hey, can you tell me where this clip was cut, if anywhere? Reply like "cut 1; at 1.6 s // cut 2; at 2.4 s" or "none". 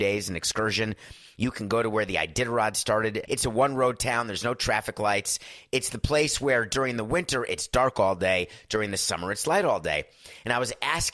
cut 1; at 3.3 s